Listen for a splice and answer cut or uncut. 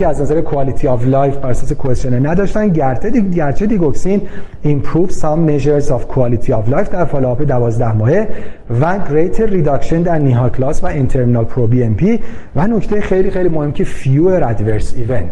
uncut